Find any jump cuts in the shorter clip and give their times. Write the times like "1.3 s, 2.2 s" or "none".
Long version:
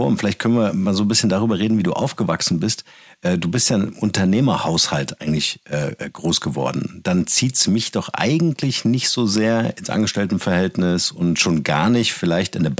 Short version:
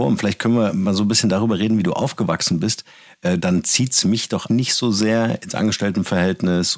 3.4 s, 4.5 s